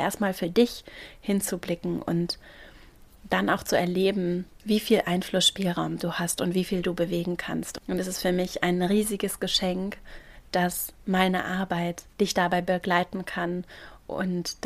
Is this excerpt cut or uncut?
cut